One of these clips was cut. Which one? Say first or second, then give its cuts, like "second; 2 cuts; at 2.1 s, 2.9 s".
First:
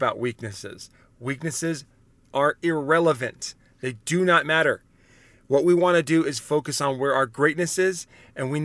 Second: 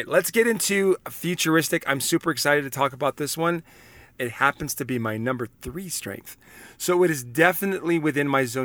second; 1 cut; at 4.2 s